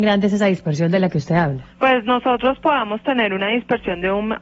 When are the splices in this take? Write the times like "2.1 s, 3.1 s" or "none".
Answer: 1.7 s